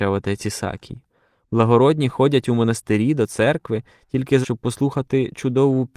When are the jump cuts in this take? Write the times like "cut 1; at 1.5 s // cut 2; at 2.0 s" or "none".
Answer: cut 1; at 4.4 s